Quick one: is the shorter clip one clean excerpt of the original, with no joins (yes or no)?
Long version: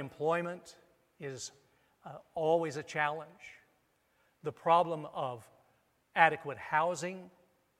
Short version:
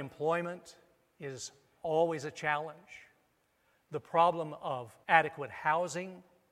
no